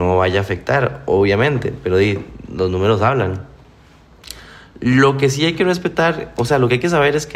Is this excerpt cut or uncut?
uncut